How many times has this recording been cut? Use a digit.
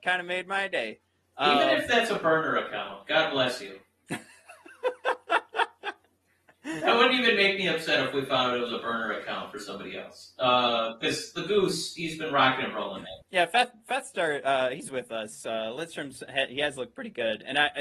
1